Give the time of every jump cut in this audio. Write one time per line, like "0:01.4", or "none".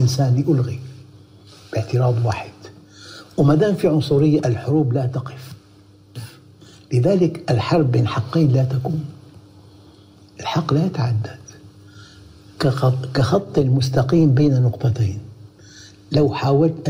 none